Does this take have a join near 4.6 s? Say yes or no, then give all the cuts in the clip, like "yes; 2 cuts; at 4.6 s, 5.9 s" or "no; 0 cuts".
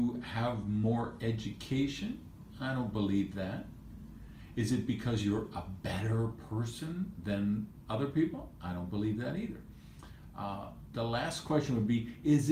no; 0 cuts